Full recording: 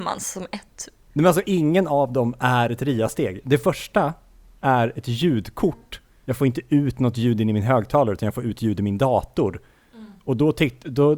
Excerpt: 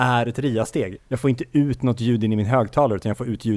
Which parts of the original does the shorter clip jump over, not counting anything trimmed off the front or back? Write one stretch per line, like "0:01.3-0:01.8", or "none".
0:03.4-0:06.2